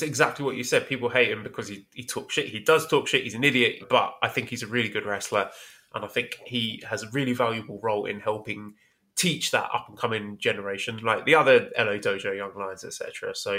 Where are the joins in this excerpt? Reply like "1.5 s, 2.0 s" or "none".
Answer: 3.8 s